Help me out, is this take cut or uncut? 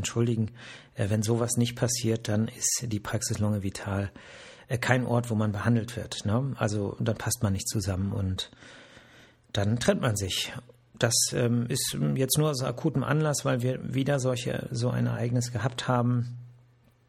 uncut